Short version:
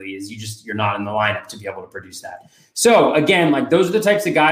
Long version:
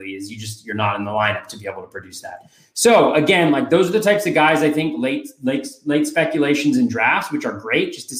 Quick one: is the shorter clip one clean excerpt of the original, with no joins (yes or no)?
yes